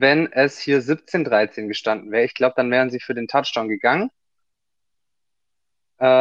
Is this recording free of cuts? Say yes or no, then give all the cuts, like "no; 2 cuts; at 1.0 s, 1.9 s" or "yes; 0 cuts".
yes; 0 cuts